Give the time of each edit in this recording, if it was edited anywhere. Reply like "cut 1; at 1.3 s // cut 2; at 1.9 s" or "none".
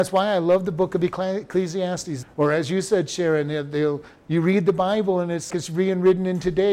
cut 1; at 2.2 s // cut 2; at 5.5 s